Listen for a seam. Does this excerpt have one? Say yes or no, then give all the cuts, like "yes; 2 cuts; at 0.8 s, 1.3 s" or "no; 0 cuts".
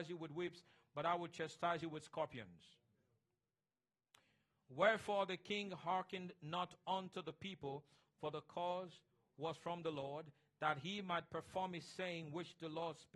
no; 0 cuts